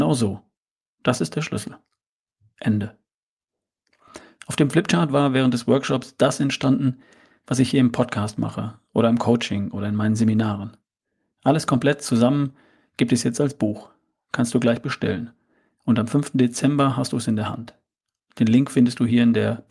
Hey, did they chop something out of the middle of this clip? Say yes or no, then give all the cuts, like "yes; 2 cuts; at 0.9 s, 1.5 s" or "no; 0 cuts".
no; 0 cuts